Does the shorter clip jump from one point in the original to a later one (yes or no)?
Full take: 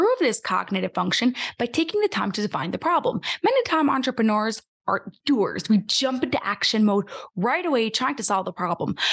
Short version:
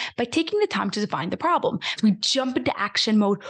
yes